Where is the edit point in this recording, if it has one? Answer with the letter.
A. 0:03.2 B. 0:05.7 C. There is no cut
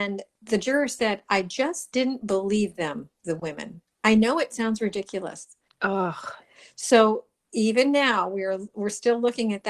B